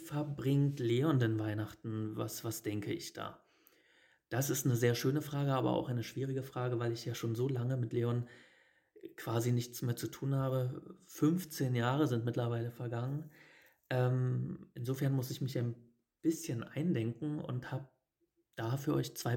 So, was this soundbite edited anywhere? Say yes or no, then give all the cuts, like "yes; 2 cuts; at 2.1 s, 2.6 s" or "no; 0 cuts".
no; 0 cuts